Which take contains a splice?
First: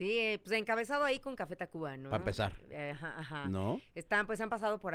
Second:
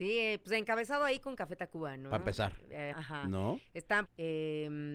second; 2 cuts; at 2.9 s, 4.1 s

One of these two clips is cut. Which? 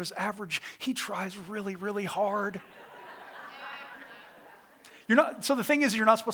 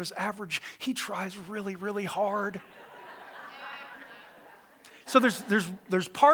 second; 1 cut; at 5.1 s

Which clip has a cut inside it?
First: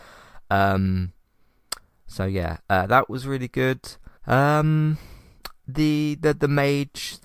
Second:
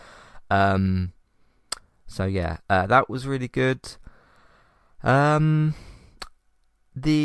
first; 2 cuts; at 4.2 s, 5.6 s

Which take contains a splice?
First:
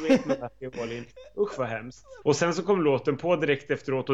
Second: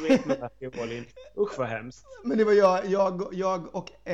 first; 1 cut; at 2.2 s

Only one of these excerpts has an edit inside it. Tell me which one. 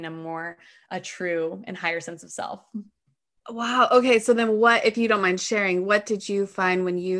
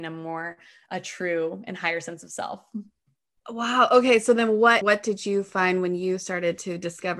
second; 1 cut; at 4.8 s

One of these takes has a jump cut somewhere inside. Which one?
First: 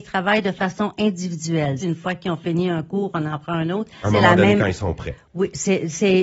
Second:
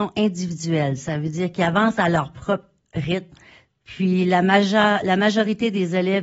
first; 2 cuts; at 1.8 s, 4.0 s

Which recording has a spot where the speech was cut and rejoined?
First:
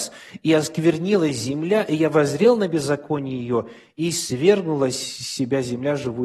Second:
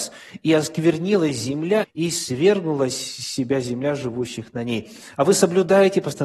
second; 1 cut; at 1.8 s

